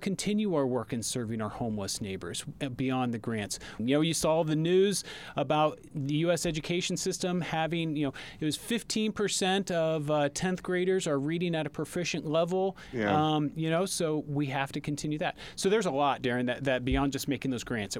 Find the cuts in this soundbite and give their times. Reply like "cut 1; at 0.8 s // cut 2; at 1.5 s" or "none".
cut 1; at 3.8 s